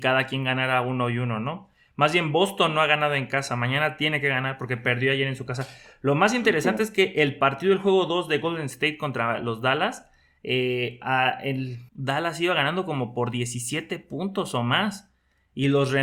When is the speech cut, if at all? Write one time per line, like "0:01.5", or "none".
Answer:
0:11.9